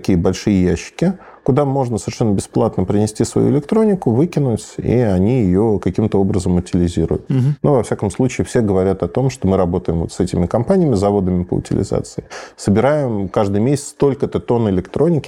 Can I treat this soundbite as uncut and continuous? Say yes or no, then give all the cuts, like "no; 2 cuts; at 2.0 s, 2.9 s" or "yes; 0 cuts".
no; 1 cut; at 12.5 s